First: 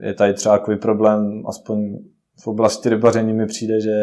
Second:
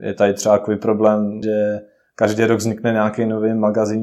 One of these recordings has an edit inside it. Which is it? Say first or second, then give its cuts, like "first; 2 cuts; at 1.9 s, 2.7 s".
second; 1 cut; at 1.4 s